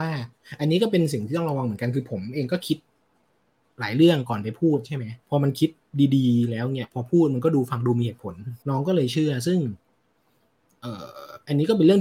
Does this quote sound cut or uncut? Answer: cut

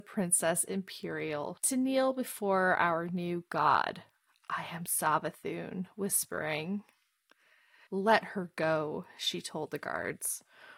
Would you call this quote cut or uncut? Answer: cut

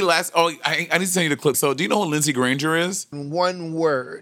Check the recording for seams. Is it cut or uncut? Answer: cut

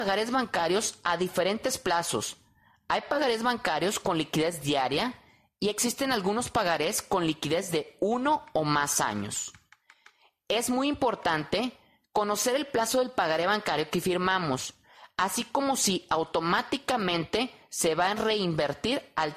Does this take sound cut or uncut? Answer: uncut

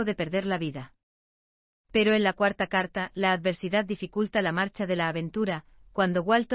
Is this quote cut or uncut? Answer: cut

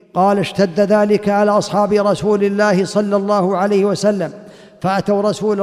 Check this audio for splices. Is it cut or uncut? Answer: uncut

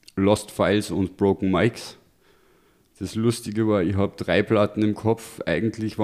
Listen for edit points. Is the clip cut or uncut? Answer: uncut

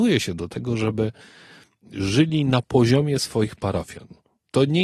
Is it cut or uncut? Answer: uncut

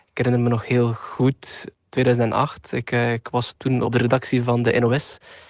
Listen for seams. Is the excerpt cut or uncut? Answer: uncut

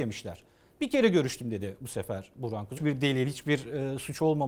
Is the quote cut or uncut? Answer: cut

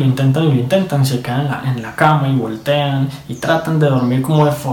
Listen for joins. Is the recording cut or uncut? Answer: uncut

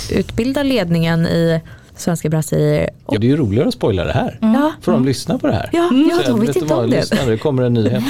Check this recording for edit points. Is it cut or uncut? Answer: cut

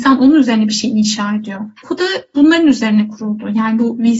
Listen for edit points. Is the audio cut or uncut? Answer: cut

